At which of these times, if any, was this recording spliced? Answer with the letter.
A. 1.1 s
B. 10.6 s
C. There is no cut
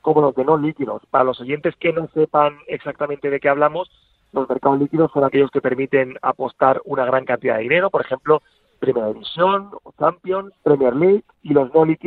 B